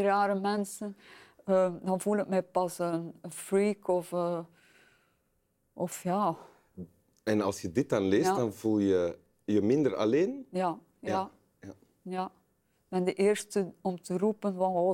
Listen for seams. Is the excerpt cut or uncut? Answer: uncut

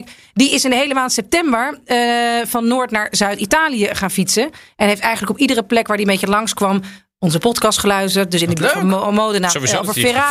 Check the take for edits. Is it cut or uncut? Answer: uncut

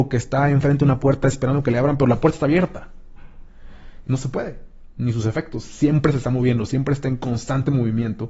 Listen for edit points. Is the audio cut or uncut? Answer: cut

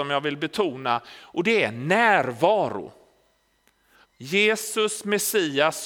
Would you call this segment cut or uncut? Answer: cut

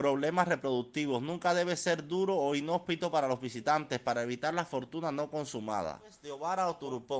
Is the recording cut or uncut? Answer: uncut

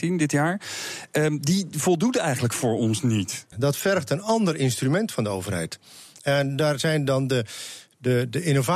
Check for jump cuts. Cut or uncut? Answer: cut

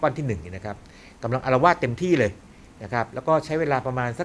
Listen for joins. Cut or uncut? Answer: uncut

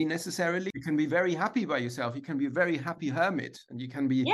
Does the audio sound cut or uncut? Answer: uncut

